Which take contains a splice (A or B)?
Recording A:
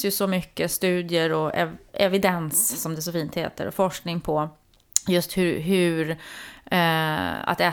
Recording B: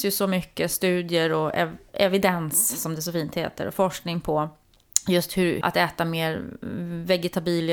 B